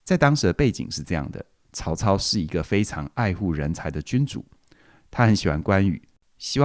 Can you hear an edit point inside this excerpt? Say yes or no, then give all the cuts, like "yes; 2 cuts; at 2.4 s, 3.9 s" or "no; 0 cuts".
yes; 1 cut; at 1.6 s